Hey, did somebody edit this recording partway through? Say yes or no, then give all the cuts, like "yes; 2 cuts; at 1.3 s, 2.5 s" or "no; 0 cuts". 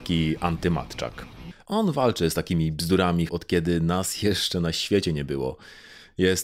yes; 2 cuts; at 1.5 s, 3.3 s